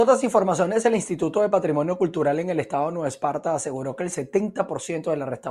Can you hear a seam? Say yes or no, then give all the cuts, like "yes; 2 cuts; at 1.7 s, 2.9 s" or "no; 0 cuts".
no; 0 cuts